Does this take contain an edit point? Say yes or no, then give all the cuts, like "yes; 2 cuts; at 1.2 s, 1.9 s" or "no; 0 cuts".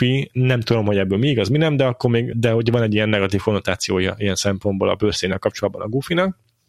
yes; 1 cut; at 2.3 s